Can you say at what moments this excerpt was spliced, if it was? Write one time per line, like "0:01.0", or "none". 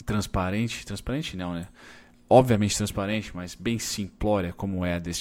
none